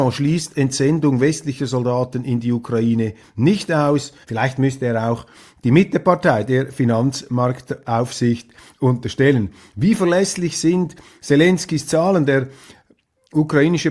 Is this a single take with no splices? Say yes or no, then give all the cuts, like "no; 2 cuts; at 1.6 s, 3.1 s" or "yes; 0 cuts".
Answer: no; 1 cut; at 4.2 s